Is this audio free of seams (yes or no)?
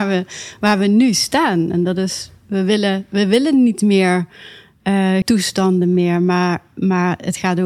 no